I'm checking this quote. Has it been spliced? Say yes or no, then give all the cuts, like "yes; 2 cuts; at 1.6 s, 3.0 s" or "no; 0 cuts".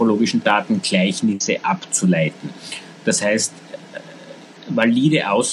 no; 0 cuts